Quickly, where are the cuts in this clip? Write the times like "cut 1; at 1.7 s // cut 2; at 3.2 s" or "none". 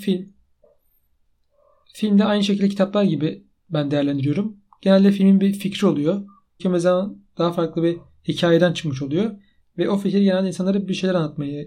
cut 1; at 6.6 s